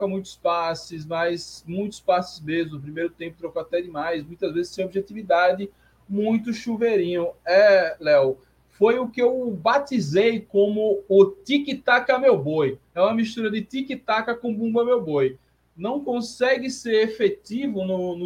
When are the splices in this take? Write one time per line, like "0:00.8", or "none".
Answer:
none